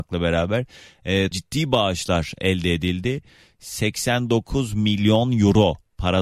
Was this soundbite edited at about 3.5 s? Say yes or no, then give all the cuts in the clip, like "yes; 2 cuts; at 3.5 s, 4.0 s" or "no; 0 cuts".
no; 1 cut; at 1.3 s